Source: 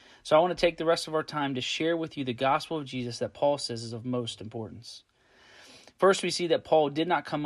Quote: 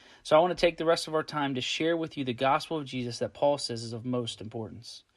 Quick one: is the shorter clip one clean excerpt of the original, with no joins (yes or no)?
yes